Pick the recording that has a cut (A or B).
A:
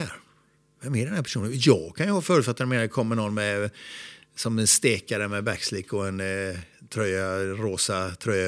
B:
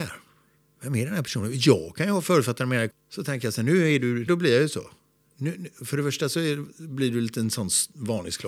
B